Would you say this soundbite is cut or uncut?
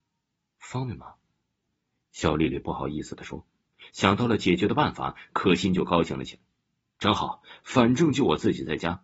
uncut